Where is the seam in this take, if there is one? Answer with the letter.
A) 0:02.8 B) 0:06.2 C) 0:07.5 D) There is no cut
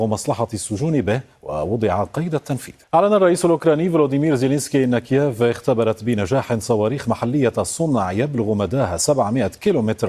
A